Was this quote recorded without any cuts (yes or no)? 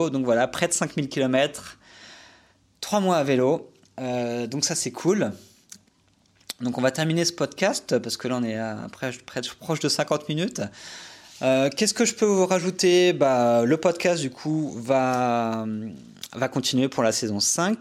yes